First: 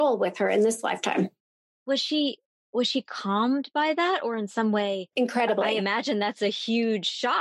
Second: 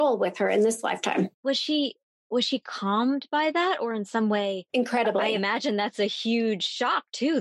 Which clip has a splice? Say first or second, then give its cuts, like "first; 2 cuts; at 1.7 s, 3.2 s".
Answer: second; 1 cut; at 1.3 s